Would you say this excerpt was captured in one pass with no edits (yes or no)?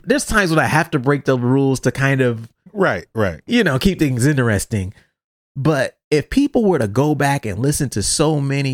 no